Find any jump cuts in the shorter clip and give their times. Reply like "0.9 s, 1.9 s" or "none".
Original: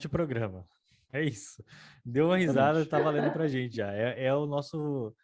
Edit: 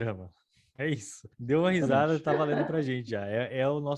1.3 s